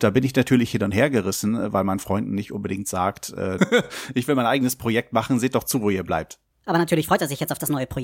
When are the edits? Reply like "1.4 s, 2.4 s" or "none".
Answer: 3.6 s, 6.5 s